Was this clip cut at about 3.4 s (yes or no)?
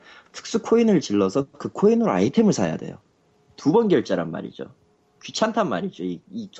no